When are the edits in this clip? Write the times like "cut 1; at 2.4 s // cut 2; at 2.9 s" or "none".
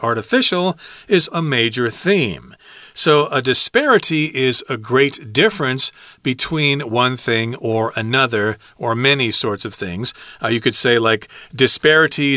cut 1; at 1.3 s